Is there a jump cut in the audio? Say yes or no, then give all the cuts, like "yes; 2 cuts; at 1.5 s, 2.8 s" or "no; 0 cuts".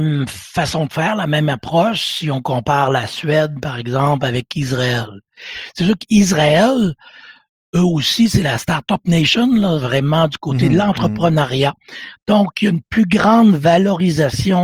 no; 0 cuts